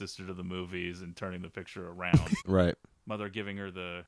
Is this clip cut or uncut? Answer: cut